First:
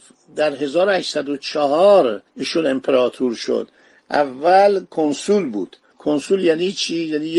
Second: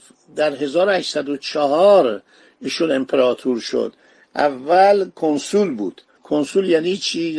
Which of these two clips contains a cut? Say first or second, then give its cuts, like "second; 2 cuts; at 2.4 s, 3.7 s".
first; 1 cut; at 2.3 s